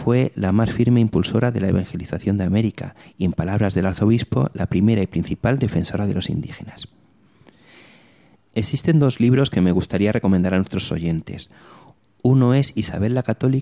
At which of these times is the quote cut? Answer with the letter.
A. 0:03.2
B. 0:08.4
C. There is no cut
B